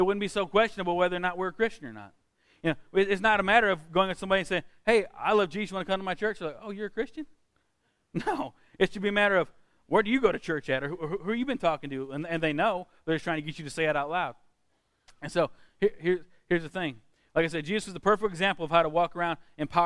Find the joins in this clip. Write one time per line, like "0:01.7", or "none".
none

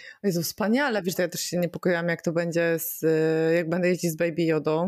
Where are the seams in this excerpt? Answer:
0:01.1

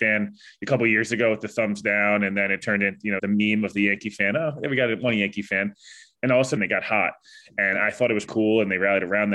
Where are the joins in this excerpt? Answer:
0:03.2
0:06.6
0:08.2

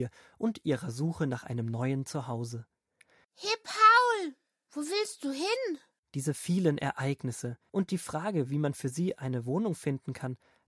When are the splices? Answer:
0:03.2
0:06.0
0:07.7

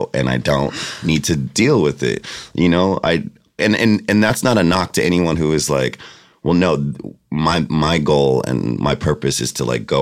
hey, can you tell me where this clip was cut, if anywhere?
0:03.6

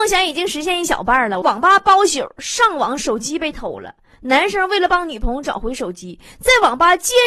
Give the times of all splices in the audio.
0:01.4

